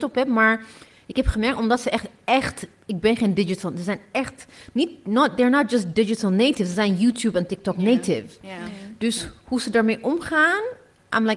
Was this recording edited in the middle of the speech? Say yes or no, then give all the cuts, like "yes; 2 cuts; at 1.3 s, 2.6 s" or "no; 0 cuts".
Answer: no; 0 cuts